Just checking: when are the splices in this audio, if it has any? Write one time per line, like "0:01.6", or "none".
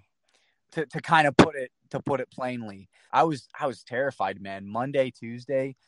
0:03.1